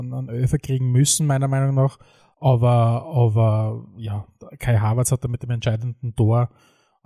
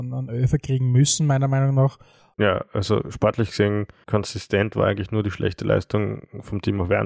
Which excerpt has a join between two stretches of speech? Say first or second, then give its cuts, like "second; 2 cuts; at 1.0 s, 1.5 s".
second; 2 cuts; at 2.3 s, 4.0 s